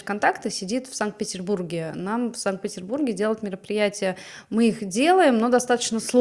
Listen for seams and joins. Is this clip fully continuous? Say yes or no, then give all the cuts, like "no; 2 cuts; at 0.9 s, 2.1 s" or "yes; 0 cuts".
yes; 0 cuts